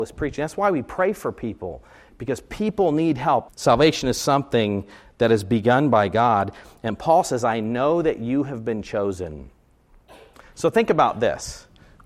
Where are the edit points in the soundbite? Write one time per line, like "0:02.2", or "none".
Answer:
0:03.5